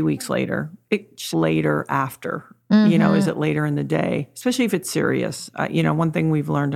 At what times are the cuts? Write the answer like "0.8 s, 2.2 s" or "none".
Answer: 1.3 s